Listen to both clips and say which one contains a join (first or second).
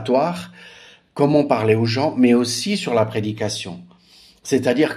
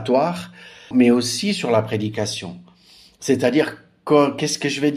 second